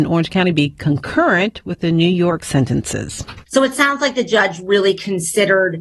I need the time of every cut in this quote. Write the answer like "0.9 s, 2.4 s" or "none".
3.5 s